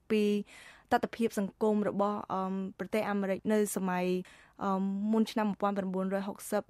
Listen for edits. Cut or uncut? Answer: uncut